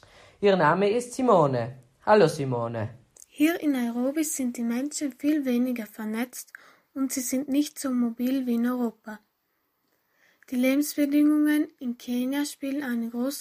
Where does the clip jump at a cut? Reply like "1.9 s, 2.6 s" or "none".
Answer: 3.2 s